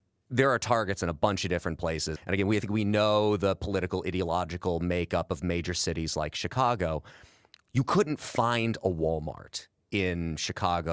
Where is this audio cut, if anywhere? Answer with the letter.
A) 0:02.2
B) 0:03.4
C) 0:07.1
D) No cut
A